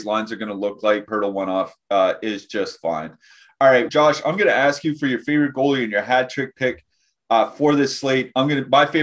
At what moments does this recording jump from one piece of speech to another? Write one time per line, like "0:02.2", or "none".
0:01.1
0:03.9